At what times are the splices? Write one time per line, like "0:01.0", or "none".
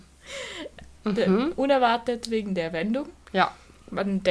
0:01.0